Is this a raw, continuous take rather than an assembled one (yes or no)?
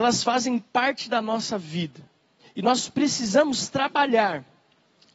yes